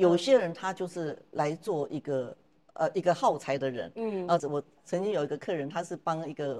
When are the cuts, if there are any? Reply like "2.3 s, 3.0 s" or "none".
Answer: 4.4 s